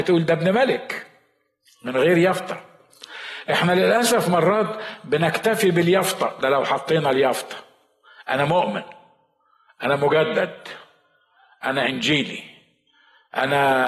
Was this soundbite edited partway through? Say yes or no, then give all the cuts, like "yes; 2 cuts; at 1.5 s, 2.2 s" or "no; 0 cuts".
no; 0 cuts